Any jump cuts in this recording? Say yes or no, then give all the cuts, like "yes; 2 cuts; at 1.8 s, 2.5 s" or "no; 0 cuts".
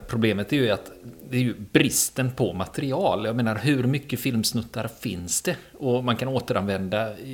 no; 0 cuts